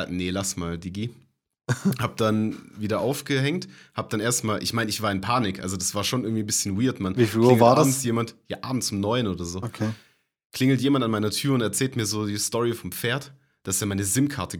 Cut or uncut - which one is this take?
uncut